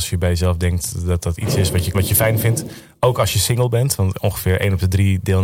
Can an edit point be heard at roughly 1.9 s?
yes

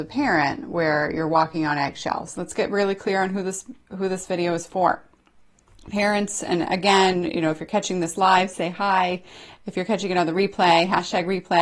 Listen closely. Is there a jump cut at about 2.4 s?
yes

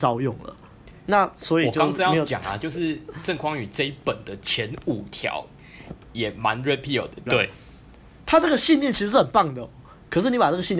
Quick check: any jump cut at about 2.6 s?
no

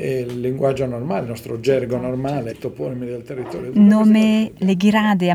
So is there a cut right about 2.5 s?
yes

